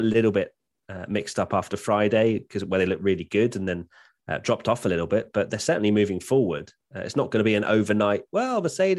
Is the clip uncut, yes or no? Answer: yes